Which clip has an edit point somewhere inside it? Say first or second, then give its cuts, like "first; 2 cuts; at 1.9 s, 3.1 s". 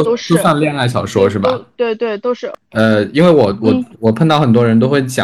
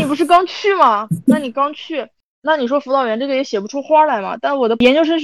first; 1 cut; at 3.9 s